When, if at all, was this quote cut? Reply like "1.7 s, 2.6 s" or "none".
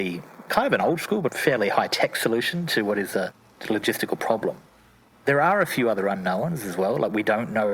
1.3 s